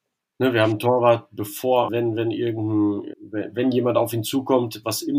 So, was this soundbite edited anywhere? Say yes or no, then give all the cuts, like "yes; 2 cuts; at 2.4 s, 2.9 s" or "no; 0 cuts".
yes; 2 cuts; at 1.9 s, 3.1 s